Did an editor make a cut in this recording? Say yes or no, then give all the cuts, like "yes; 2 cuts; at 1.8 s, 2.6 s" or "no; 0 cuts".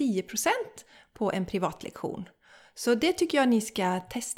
no; 0 cuts